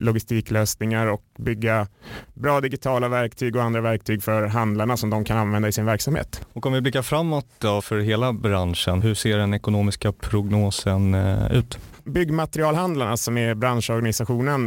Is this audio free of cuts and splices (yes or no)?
yes